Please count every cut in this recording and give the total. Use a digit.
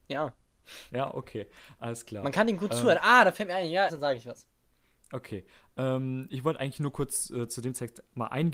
2